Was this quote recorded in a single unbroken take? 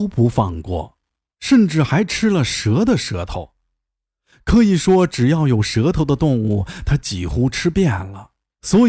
yes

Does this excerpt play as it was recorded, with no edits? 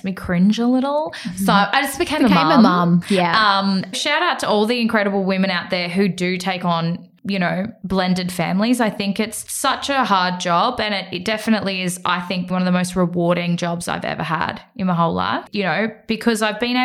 no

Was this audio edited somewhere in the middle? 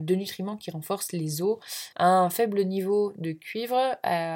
yes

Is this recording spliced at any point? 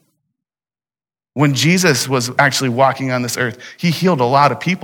no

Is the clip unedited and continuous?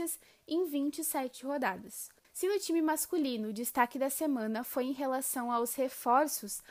no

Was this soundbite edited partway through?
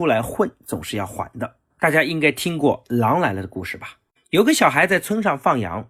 no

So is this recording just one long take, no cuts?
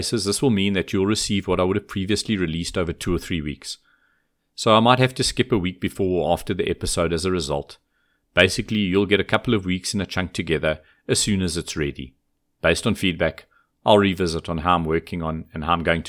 no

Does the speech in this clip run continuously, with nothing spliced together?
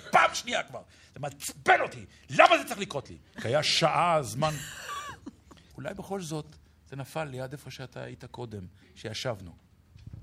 no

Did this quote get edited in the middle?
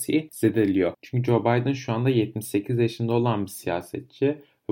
yes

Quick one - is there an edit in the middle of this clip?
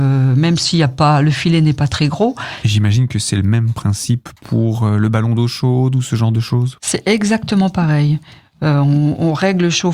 yes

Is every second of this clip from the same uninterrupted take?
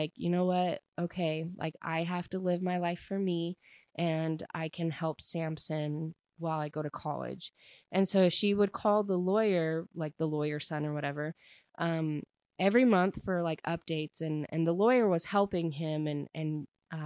yes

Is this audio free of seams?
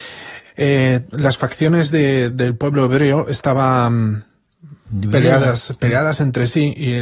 yes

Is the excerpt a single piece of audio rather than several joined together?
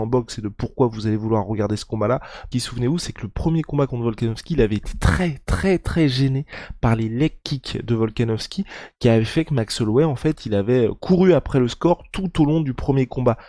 no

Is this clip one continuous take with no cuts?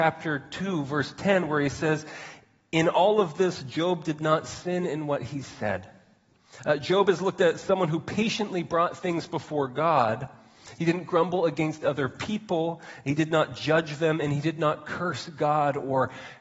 yes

